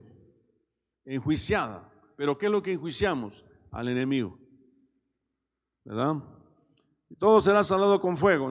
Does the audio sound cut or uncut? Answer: cut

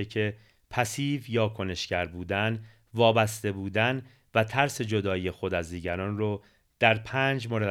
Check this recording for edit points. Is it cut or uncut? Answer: uncut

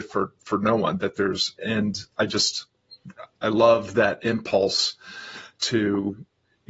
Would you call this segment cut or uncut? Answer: cut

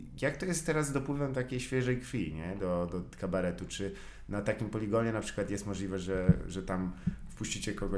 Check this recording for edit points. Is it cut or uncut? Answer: uncut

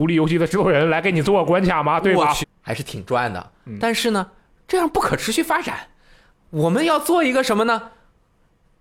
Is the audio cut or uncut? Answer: cut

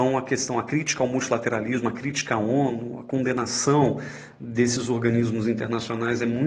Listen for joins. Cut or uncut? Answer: uncut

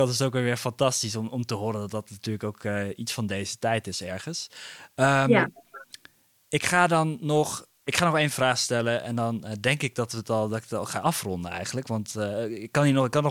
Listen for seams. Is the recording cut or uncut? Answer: uncut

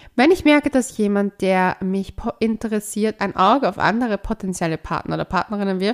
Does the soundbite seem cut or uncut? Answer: uncut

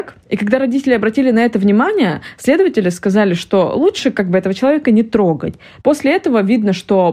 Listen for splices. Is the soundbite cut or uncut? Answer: cut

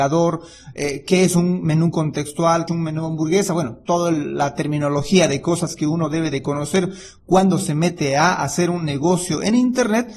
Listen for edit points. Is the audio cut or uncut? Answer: cut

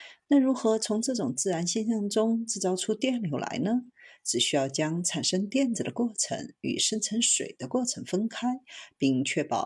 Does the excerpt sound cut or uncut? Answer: uncut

